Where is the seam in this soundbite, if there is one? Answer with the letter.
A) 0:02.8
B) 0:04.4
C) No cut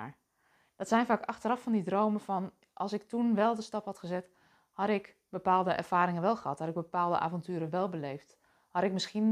C